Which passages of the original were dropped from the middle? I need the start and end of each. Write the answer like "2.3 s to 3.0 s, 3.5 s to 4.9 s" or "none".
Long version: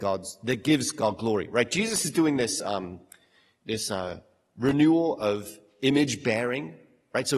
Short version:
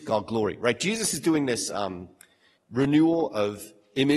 3.5 s to 4.4 s